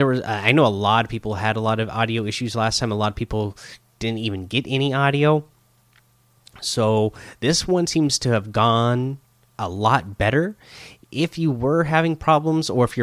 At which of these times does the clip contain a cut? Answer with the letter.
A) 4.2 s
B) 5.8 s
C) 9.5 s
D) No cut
C